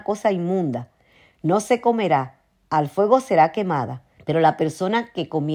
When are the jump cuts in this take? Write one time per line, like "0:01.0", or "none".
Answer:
0:04.2